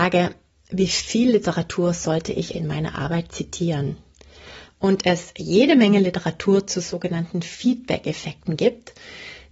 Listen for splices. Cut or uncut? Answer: cut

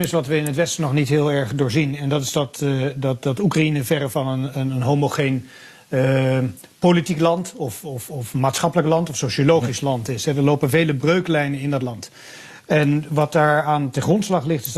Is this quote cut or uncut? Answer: uncut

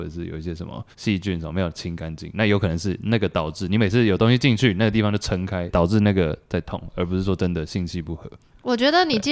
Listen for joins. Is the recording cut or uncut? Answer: cut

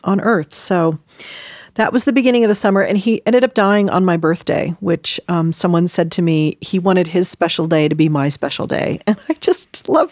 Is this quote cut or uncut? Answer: uncut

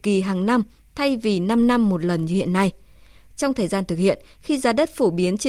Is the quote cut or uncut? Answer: uncut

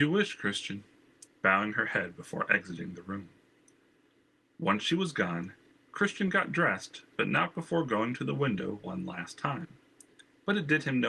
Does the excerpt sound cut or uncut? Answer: cut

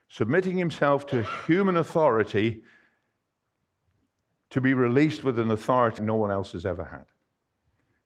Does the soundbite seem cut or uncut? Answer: cut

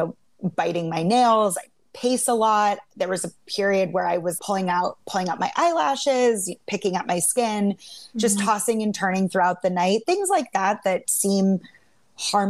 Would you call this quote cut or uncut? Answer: cut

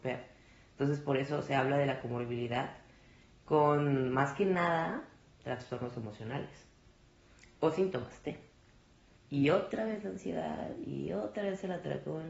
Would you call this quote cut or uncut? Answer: cut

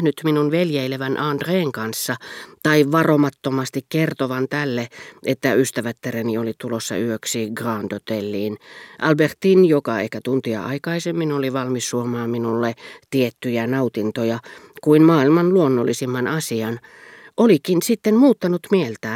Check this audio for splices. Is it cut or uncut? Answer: uncut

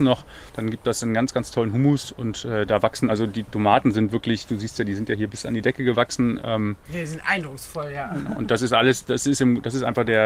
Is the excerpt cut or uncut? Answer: uncut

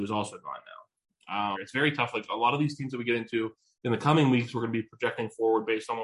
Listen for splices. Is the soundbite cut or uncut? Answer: cut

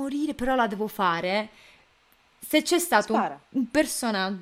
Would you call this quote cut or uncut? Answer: uncut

